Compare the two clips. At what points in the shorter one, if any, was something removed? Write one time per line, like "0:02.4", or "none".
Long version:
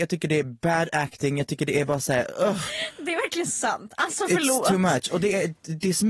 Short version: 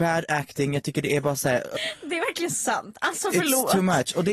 0:01.8

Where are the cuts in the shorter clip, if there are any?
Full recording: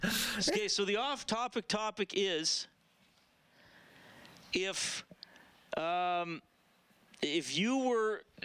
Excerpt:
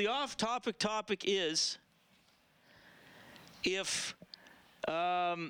none

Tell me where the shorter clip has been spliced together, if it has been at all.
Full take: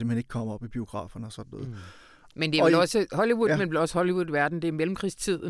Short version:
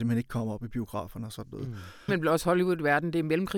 0:02.1

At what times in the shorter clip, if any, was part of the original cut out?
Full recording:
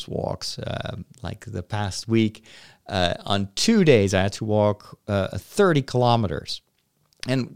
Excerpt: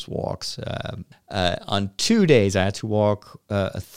0:01.1

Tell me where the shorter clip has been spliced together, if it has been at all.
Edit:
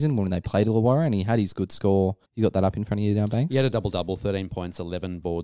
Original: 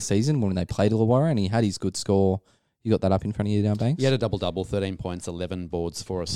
0:02.2

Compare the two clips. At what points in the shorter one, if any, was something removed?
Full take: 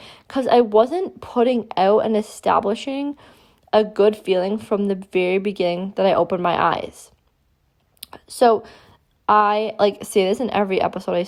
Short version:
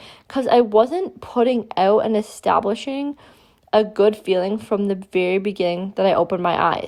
none

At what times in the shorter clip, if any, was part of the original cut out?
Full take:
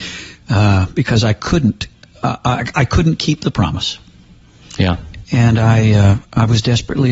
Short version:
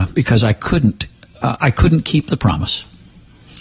0:01.6

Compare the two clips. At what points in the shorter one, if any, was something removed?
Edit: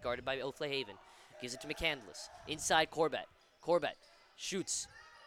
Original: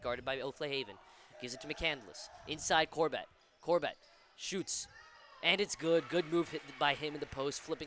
none

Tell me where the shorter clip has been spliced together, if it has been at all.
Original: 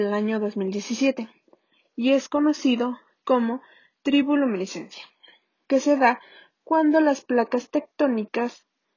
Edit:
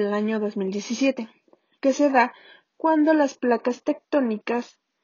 0:01.7

